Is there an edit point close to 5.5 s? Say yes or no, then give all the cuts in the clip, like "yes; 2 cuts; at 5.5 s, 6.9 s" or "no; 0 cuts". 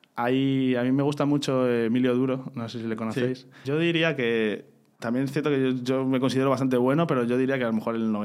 no; 1 cut; at 3.6 s